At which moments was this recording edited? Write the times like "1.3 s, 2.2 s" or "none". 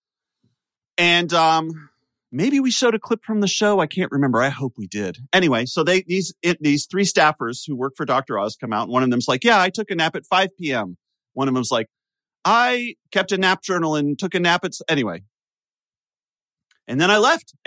13.0 s